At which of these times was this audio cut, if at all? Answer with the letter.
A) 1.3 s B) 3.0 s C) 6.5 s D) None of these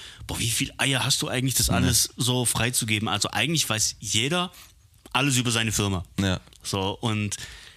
D